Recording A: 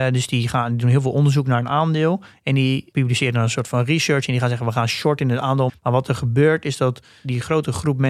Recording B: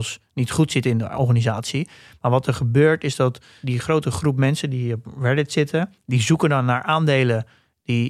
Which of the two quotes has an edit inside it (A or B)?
A